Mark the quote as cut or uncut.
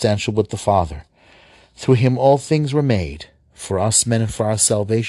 uncut